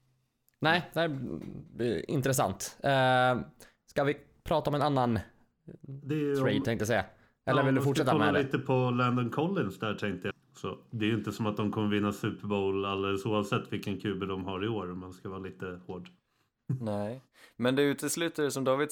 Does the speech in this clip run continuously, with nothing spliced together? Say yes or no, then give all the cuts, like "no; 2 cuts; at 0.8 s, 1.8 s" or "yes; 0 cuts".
no; 1 cut; at 10.3 s